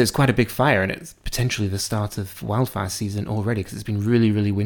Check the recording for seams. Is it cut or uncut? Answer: uncut